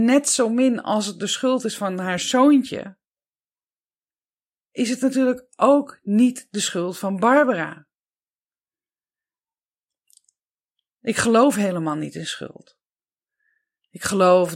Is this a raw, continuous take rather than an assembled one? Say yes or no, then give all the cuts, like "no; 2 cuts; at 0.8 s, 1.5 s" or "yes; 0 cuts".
yes; 0 cuts